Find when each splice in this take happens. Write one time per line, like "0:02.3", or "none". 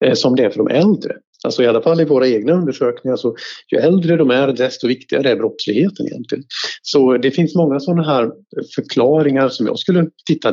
none